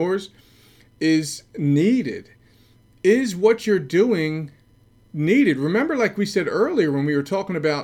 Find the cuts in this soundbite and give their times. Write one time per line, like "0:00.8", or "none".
none